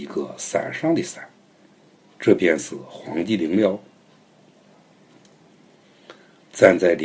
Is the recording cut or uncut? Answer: uncut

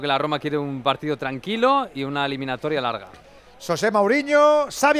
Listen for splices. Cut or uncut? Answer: uncut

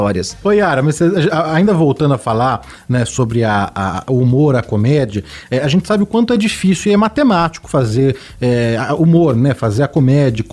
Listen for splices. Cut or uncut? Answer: uncut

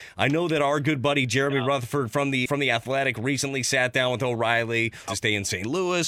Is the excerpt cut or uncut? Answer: cut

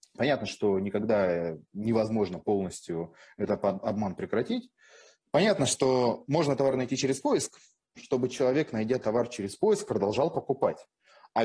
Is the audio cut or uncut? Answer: cut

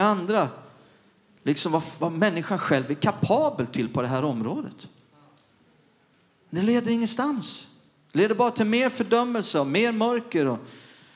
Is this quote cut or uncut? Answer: uncut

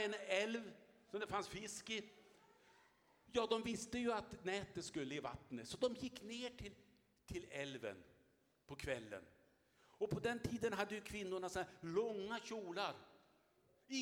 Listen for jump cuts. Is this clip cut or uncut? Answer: uncut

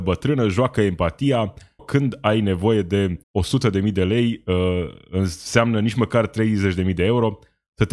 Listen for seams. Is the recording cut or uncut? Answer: cut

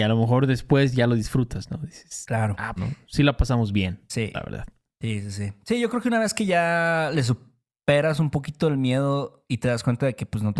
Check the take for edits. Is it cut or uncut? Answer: cut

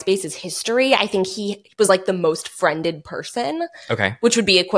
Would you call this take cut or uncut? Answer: uncut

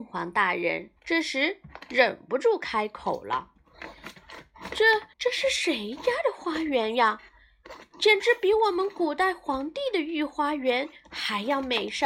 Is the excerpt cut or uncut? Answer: cut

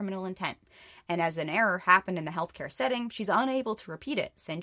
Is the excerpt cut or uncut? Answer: uncut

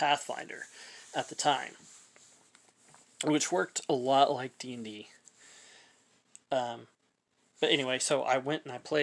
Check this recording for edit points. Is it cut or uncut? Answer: uncut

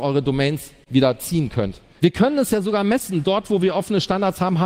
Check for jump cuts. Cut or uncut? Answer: cut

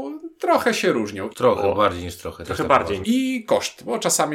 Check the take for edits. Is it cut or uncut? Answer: cut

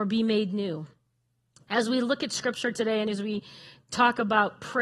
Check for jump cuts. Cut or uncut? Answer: uncut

